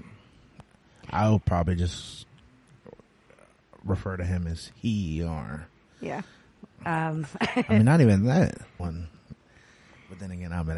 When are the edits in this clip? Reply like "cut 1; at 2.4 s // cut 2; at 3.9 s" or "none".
cut 1; at 6.8 s // cut 2; at 8.8 s